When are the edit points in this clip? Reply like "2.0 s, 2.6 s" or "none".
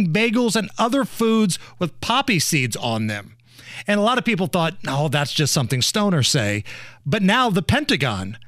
3.8 s

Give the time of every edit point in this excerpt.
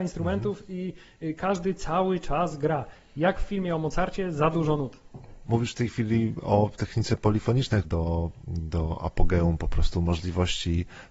5.4 s, 7.8 s

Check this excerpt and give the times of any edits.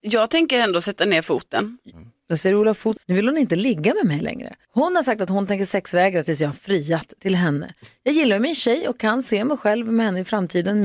3.0 s

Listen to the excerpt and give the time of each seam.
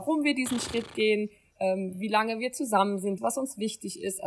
3.2 s

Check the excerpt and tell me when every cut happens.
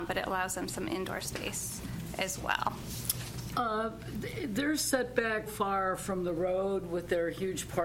3.5 s, 5.5 s

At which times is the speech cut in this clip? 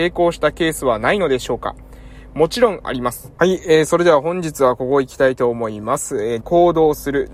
3.4 s, 6.4 s

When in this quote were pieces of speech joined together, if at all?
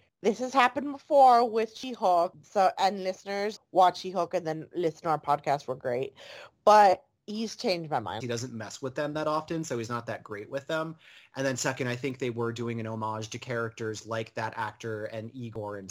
3.6 s, 8.2 s

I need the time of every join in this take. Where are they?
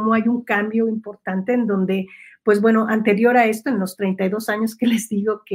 none

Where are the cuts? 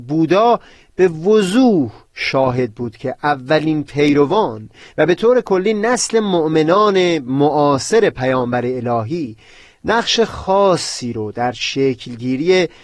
none

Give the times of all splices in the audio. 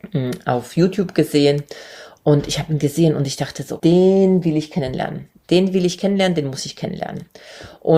3.8 s

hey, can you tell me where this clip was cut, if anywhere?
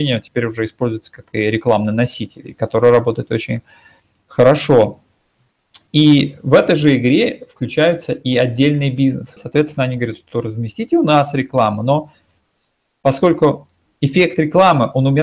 9.4 s

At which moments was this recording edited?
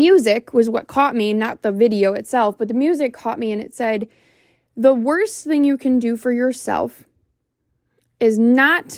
none

